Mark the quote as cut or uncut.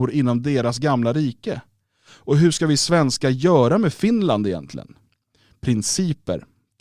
uncut